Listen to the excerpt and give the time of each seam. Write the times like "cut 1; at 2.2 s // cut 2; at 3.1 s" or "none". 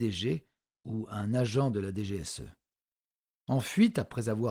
cut 1; at 3.4 s